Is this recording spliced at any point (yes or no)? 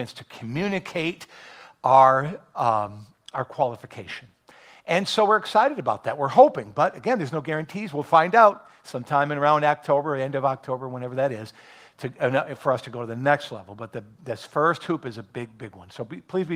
yes